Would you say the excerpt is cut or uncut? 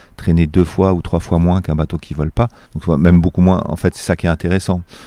cut